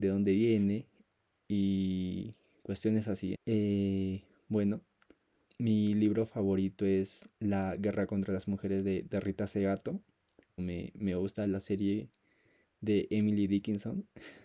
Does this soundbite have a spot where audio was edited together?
yes; 3 cuts; at 3.3 s, 5.5 s, 10.6 s

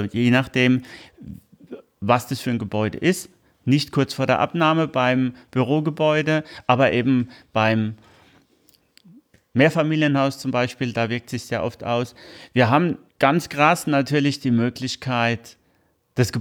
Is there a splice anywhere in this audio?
yes; 1 cut; at 13.1 s

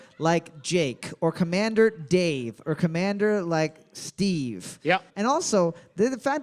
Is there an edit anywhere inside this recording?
yes; 1 cut; at 5.1 s

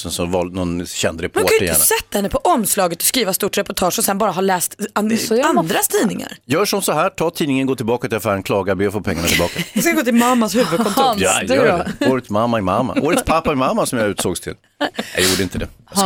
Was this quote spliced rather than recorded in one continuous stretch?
no; 0 cuts

